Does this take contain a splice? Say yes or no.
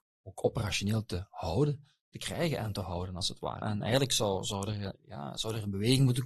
yes